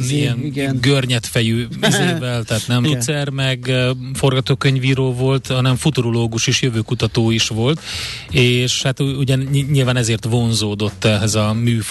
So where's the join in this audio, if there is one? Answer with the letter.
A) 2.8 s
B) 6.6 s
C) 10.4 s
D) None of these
A